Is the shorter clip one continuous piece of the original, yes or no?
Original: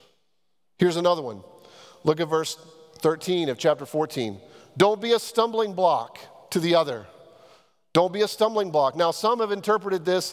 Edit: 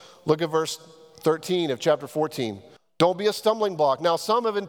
no